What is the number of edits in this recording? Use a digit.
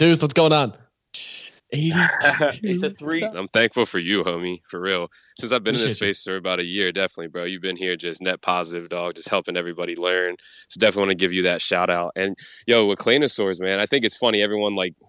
2